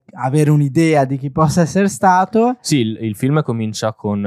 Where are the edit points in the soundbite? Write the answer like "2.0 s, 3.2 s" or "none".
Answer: none